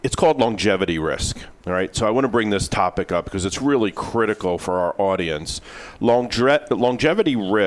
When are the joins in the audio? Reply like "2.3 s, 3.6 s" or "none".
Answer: none